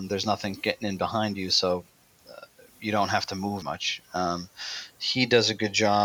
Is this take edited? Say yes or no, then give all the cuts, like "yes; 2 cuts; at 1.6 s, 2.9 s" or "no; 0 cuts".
yes; 1 cut; at 3.6 s